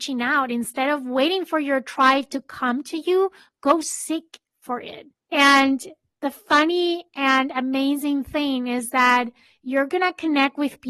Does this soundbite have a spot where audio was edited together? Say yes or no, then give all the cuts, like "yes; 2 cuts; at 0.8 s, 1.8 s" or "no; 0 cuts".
yes; 1 cut; at 5.3 s